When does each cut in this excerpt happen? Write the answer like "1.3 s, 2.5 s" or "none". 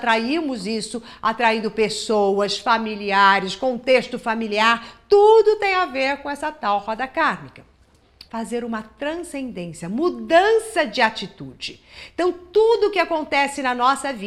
8.3 s